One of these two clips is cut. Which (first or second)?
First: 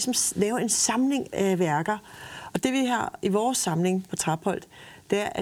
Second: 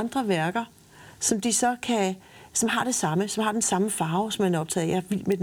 first